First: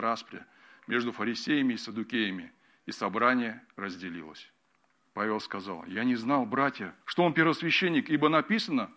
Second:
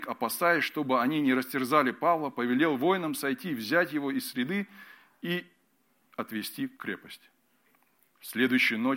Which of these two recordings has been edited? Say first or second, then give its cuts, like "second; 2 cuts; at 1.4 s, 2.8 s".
first; 2 cuts; at 5.0 s, 7.0 s